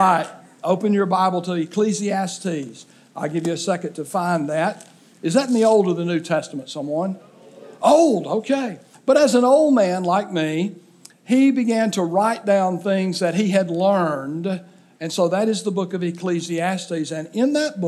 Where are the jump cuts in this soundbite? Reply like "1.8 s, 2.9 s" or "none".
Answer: 8.9 s, 11.1 s